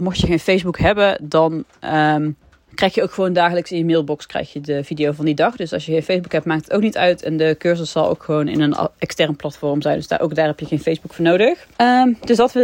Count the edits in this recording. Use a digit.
1